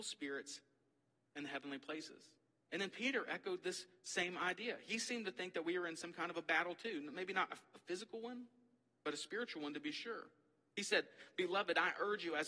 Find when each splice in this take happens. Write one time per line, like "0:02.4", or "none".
none

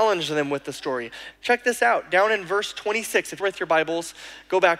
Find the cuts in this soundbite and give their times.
0:01.3
0:03.4

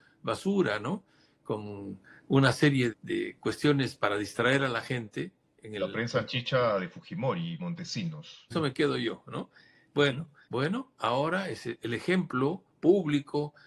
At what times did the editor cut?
0:02.9
0:08.5
0:10.4

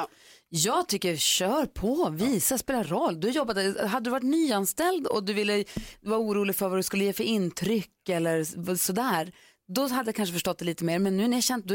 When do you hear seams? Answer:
none

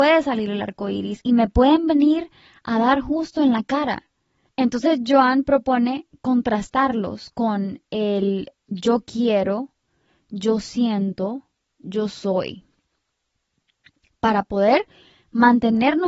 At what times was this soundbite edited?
0:04.5

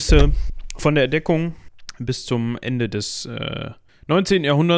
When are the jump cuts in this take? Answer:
none

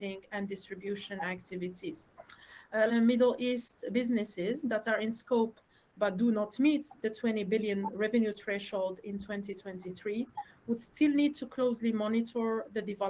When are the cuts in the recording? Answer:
0:02.9

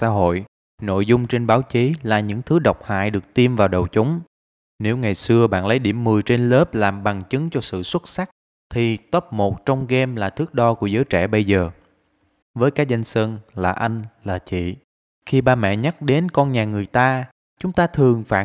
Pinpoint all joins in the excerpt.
0:12.4

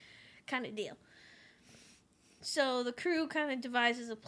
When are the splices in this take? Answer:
none

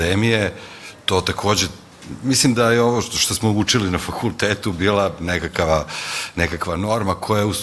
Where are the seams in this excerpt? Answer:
none

